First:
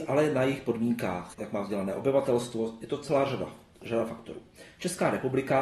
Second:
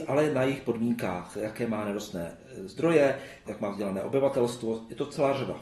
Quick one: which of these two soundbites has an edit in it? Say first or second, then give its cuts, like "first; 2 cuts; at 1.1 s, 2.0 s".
first; 1 cut; at 1.3 s